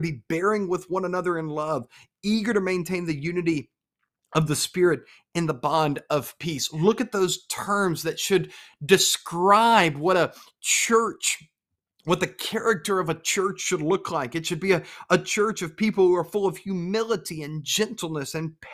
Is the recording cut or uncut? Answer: uncut